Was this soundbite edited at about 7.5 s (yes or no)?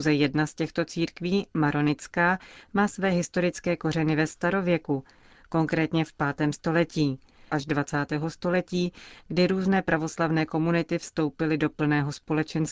yes